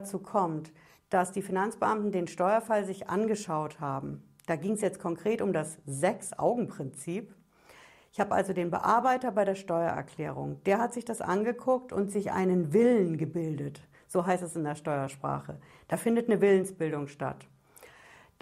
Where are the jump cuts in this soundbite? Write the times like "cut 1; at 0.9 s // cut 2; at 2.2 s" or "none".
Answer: none

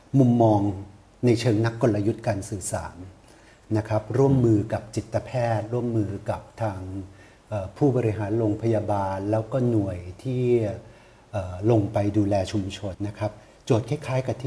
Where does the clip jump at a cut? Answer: cut 1; at 12.9 s

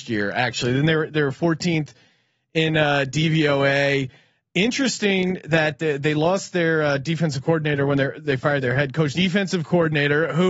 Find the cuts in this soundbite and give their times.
cut 1; at 9.1 s

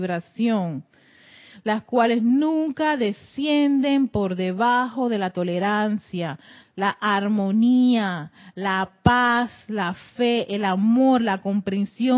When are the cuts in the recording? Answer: none

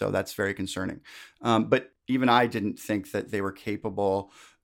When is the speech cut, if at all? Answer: none

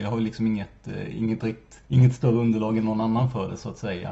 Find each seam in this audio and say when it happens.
cut 1; at 1.8 s

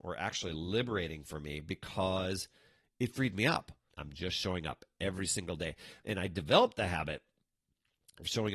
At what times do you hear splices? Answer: cut 1; at 3.9 s

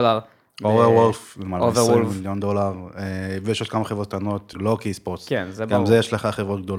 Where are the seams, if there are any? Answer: cut 1; at 4.5 s

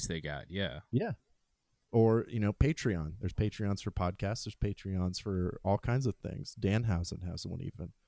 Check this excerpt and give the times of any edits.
none

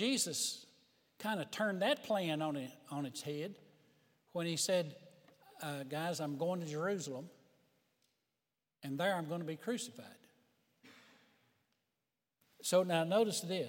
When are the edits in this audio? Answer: none

